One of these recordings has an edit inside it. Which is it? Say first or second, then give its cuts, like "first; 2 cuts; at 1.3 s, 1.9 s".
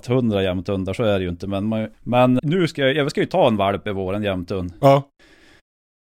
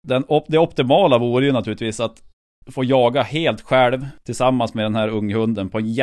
first; 1 cut; at 2.4 s